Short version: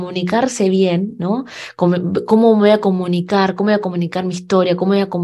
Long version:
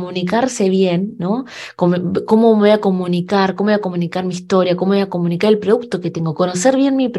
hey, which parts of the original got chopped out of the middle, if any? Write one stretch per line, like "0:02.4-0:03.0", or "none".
none